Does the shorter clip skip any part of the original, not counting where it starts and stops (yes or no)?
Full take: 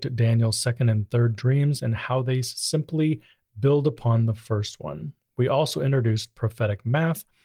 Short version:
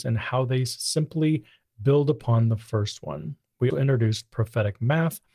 yes